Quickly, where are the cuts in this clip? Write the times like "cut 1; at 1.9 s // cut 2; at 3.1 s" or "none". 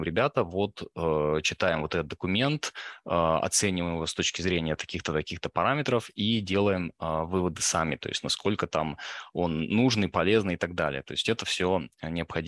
none